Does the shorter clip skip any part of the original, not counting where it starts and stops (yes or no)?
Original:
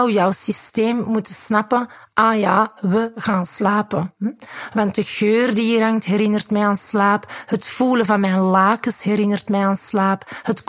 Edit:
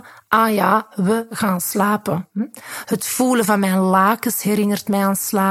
yes